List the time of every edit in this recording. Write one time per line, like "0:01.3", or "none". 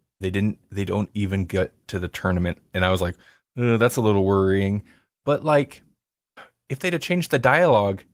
none